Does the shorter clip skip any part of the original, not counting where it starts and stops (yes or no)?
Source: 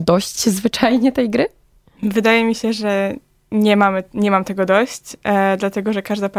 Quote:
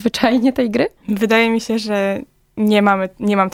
yes